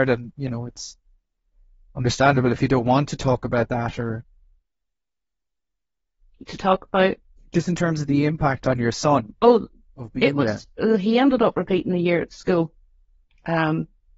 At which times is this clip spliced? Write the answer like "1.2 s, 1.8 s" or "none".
none